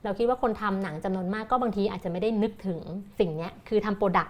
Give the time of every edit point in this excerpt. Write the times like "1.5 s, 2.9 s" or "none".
3.1 s